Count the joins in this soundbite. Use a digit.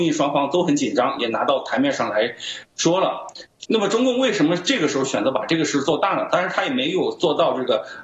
1